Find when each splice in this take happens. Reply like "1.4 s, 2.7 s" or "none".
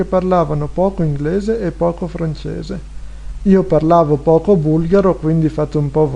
none